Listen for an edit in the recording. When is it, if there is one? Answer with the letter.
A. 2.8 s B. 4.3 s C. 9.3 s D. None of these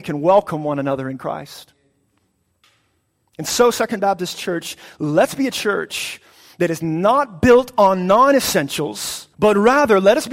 C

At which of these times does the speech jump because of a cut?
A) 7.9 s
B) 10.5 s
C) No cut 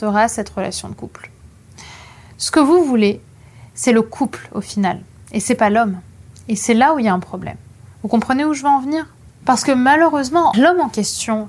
B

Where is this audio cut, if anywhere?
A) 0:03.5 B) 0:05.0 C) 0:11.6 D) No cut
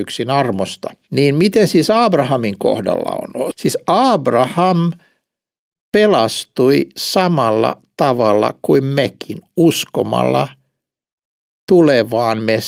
A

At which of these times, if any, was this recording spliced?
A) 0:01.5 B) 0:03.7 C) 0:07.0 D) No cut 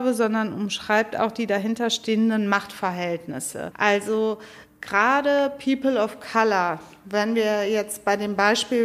B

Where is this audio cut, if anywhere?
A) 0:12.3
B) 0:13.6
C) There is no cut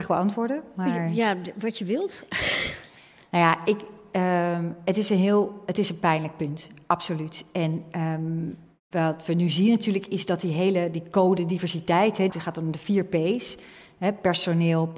A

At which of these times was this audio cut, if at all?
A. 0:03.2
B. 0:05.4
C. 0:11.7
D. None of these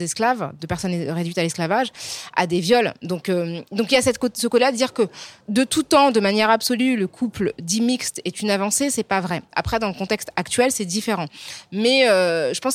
B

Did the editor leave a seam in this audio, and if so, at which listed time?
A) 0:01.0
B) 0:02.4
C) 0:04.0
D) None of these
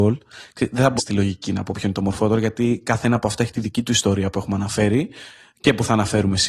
A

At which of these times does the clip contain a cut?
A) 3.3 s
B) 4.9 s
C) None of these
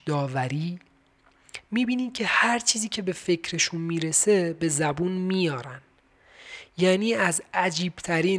C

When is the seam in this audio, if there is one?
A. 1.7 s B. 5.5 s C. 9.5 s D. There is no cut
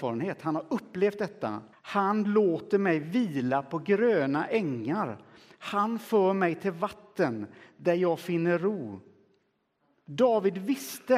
A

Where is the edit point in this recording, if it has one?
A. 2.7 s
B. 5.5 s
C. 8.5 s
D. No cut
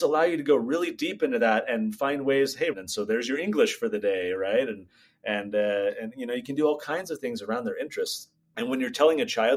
A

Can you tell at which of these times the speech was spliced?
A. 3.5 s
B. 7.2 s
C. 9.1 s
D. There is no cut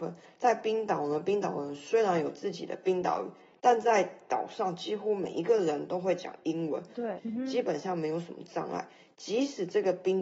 B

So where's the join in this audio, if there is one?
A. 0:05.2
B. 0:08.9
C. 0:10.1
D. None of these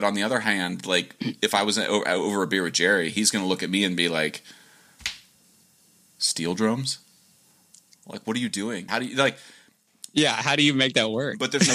B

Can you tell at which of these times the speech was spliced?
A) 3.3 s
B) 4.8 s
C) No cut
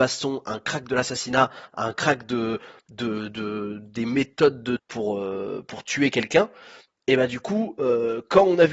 B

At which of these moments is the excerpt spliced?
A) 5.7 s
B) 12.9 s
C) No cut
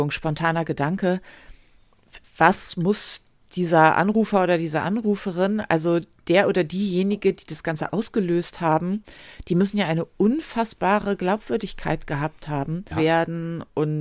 B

